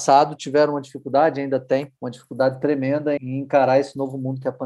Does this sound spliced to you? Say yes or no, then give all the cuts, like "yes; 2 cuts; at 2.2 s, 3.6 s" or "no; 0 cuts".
yes; 2 cuts; at 2.0 s, 3.2 s